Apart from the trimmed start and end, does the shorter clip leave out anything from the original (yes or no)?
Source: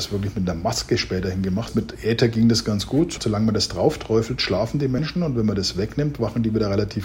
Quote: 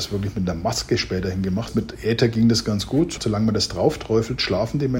no